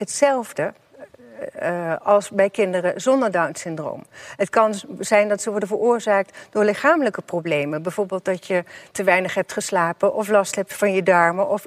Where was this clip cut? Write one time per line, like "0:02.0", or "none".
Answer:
none